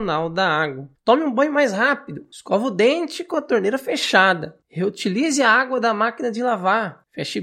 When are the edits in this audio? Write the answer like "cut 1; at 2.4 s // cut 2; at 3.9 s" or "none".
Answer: none